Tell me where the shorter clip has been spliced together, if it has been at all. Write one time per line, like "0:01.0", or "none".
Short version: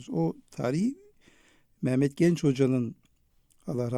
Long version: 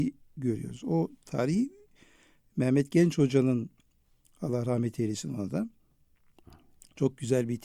none